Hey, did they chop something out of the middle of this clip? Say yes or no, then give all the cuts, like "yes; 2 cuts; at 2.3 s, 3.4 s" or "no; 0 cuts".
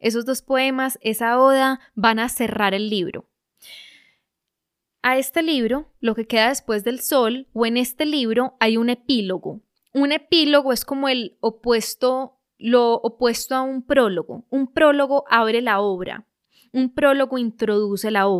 no; 0 cuts